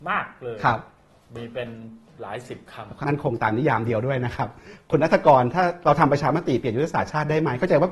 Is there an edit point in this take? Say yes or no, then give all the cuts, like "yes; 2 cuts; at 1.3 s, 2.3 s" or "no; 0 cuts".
yes; 1 cut; at 3.0 s